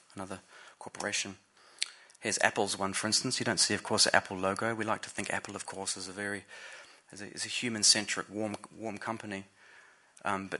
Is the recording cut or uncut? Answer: uncut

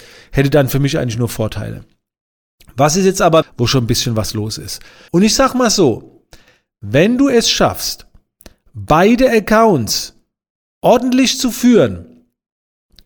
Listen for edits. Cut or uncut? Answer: cut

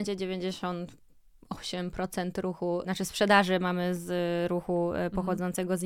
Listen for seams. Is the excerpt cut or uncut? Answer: cut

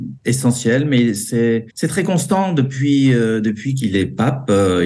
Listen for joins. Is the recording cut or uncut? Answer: cut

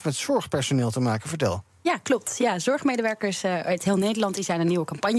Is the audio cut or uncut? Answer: uncut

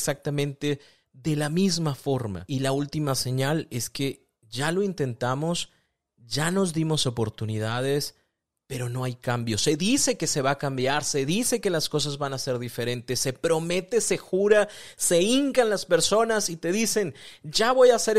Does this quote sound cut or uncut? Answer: cut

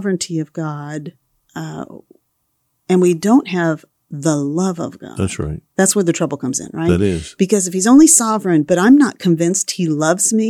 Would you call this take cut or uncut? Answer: uncut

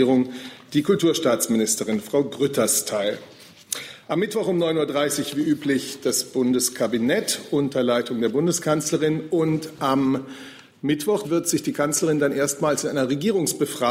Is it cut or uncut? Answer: cut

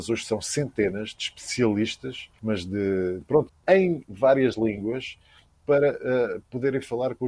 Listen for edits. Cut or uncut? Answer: cut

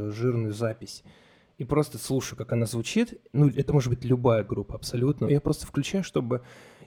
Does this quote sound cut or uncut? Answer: cut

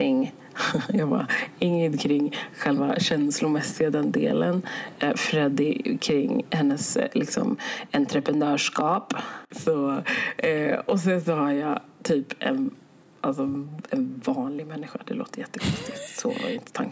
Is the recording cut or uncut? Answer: uncut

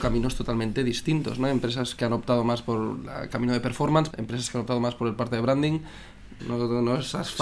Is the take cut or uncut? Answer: cut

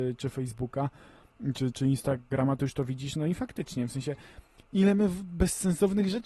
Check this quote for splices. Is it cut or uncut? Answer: cut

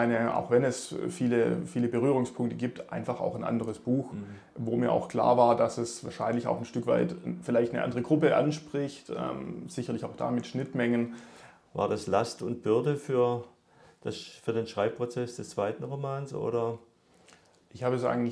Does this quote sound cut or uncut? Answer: cut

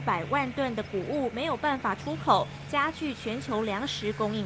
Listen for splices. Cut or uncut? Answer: uncut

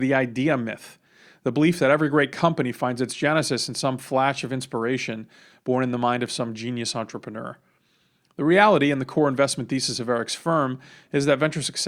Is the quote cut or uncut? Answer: uncut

